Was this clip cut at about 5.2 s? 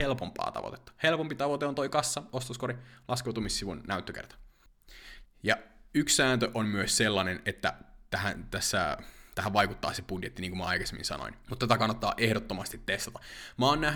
yes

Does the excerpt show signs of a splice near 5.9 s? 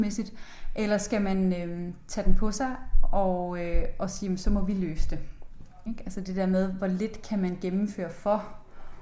yes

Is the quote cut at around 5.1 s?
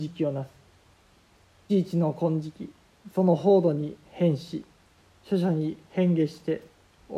no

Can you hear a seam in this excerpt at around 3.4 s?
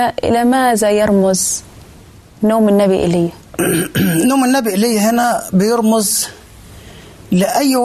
yes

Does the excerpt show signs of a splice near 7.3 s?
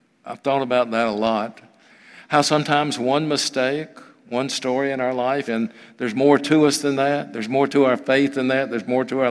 no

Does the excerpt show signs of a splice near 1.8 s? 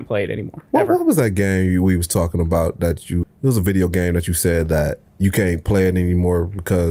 no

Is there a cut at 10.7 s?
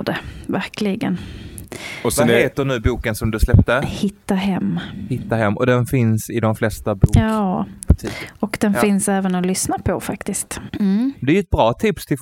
yes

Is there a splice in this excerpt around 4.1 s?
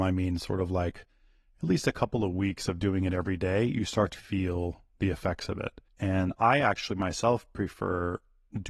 yes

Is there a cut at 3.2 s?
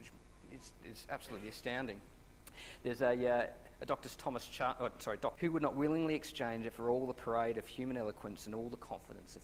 no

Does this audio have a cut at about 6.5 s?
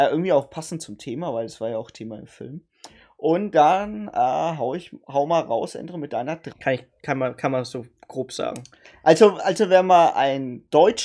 yes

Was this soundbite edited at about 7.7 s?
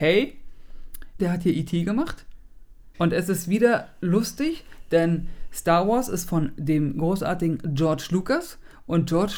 no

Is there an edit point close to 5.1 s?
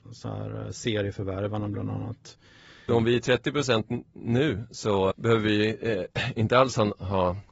yes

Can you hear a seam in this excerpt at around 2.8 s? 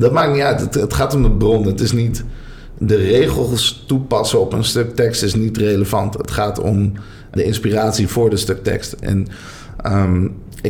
no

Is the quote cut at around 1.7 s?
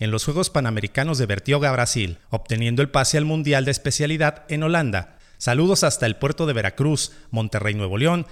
no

